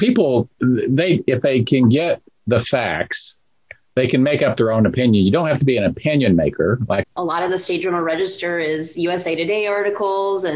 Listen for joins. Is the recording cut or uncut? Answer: cut